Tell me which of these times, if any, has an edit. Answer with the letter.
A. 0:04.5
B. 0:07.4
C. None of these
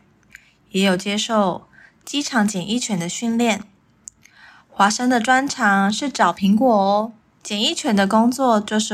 B